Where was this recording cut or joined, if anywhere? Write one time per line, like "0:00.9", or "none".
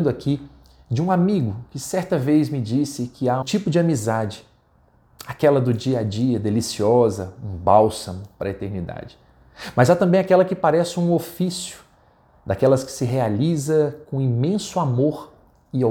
0:03.4